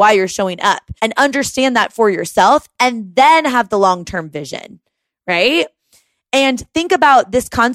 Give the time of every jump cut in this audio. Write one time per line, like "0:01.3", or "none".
0:01.0